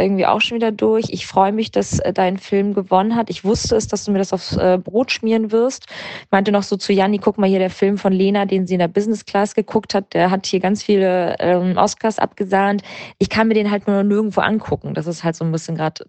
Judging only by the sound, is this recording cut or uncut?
uncut